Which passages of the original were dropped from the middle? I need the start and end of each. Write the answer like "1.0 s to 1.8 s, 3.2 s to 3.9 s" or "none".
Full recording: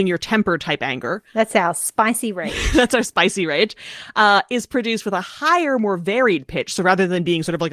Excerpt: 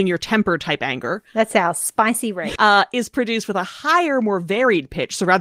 2.6 s to 4.1 s